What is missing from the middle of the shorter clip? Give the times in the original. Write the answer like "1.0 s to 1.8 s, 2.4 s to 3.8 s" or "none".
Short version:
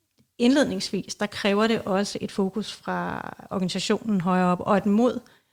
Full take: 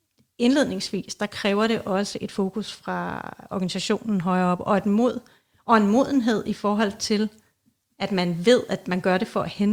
none